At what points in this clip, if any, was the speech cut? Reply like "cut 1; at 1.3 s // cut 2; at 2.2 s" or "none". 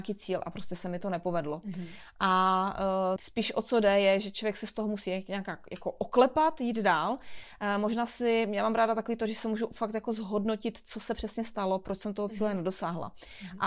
cut 1; at 3.2 s

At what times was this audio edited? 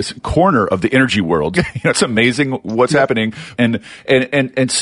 cut 1; at 1.5 s // cut 2; at 3.6 s

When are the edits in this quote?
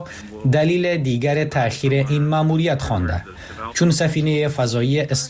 cut 1; at 3.7 s

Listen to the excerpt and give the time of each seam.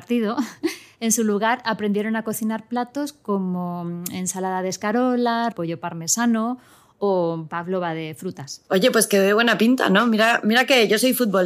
cut 1; at 5.5 s

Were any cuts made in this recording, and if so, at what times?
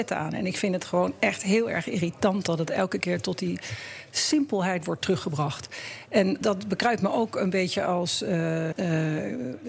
cut 1; at 6.4 s // cut 2; at 8.7 s

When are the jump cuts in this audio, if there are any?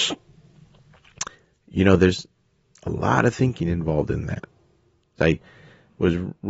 cut 1; at 5.2 s

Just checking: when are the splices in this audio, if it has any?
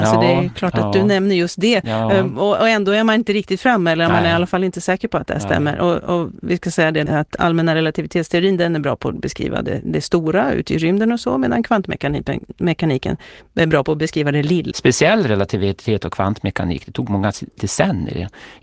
cut 1; at 7.1 s // cut 2; at 14.7 s

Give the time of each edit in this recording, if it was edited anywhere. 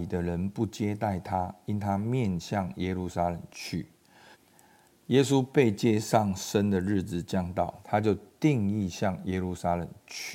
cut 1; at 4.3 s // cut 2; at 7.8 s

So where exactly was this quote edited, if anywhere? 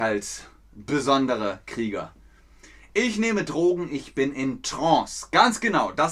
none

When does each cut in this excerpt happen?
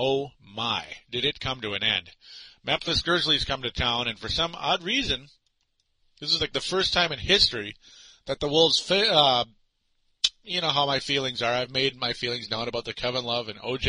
none

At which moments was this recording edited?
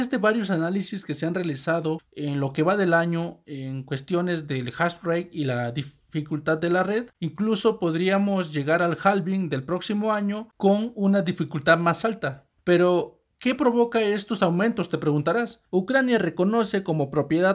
cut 1; at 7.1 s // cut 2; at 15.7 s

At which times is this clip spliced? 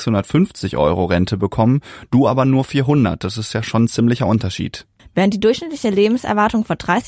cut 1; at 5.0 s

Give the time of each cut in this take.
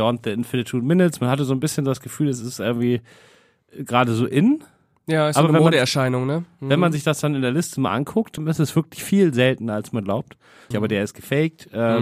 cut 1; at 8.4 s // cut 2; at 10.7 s

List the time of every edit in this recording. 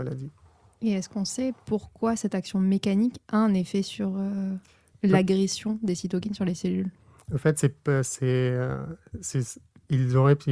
none

